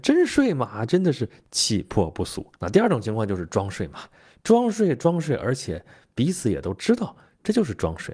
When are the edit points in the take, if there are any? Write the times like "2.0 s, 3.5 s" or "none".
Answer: 2.6 s